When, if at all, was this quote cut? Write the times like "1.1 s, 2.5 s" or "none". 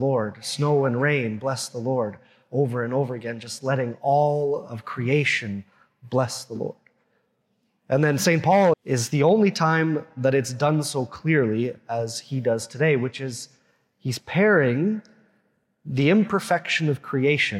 8.7 s